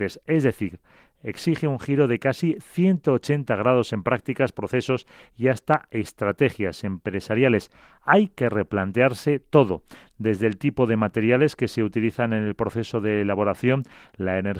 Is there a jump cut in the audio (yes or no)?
no